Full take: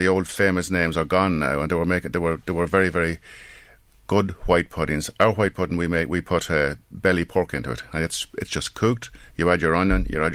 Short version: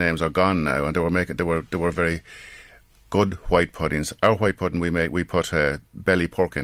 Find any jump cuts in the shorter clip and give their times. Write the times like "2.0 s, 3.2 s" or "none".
1.9 s